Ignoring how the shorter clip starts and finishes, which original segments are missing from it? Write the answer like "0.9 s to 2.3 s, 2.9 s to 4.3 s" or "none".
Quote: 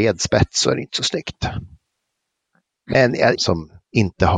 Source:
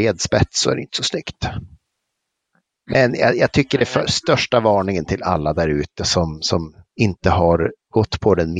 3.4 s to 6.4 s